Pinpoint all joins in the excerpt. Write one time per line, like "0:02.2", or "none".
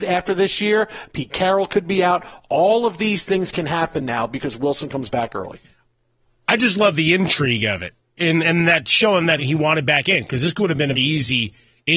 0:09.4
0:11.0